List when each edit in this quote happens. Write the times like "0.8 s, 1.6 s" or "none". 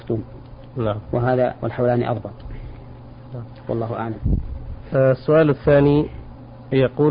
none